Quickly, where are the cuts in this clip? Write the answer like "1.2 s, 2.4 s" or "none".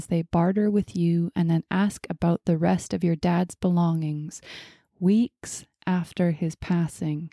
none